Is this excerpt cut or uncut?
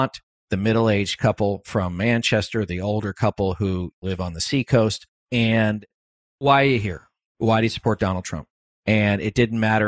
cut